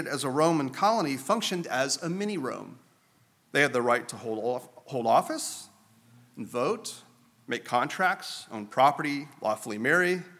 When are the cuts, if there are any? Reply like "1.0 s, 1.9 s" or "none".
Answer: 3.4 s